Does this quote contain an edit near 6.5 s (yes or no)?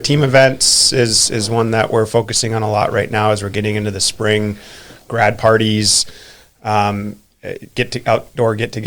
no